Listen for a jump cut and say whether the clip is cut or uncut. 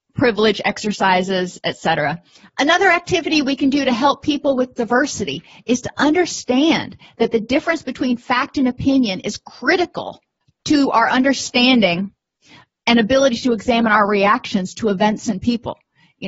cut